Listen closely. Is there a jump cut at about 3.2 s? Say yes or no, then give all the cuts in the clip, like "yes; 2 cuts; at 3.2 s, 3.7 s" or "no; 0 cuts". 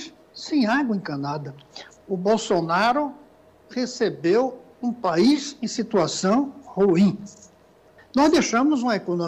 no; 2 cuts; at 1.9 s, 8.0 s